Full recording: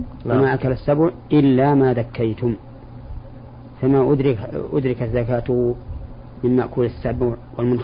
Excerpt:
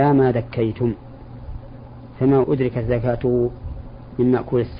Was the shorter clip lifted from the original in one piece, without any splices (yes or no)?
no